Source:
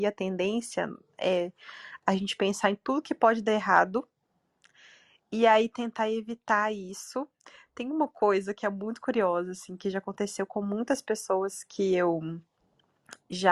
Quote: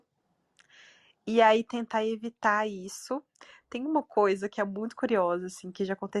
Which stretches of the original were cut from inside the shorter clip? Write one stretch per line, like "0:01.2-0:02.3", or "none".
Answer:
none